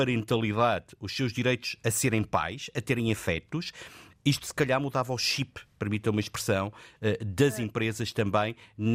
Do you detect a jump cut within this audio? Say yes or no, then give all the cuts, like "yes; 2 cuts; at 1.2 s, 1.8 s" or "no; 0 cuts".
no; 0 cuts